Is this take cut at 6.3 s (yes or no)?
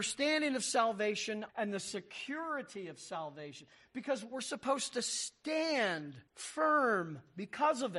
yes